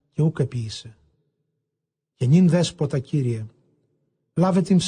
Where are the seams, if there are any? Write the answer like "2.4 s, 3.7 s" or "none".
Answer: 2.1 s